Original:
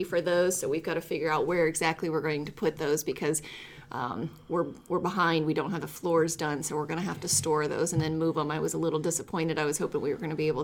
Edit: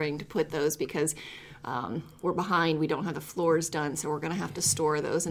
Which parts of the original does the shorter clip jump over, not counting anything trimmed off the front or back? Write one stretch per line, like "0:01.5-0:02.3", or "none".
0:04.4-0:04.8